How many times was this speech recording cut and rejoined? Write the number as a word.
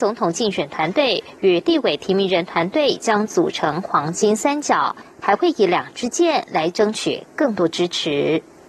one